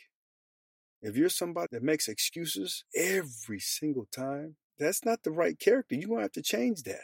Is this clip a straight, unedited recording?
no; 3 cuts; at 1.7 s, 2.9 s, 4.7 s

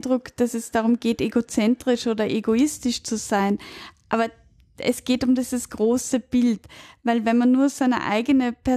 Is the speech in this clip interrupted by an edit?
no; 0 cuts

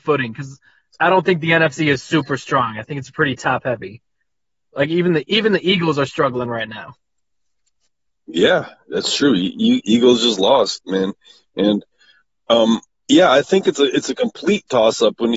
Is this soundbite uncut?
yes; 0 cuts

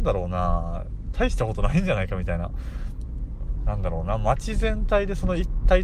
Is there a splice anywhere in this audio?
yes; 1 cut; at 3.6 s

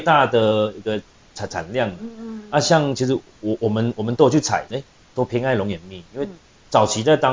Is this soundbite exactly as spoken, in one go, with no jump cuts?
no; 1 cut; at 4.7 s

